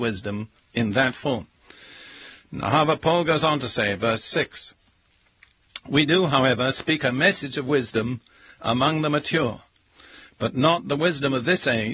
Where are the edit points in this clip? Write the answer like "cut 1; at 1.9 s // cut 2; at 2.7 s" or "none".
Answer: none